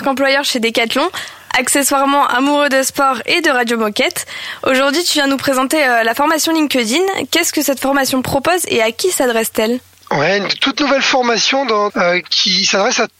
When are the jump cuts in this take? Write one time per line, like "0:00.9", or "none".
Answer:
0:11.9